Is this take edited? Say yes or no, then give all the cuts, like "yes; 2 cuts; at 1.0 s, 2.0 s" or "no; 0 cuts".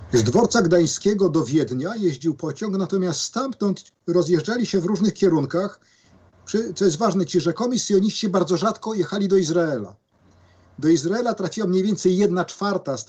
no; 0 cuts